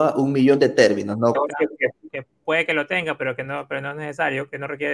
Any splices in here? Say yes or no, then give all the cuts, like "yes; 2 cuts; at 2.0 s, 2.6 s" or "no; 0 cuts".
yes; 1 cut; at 1.3 s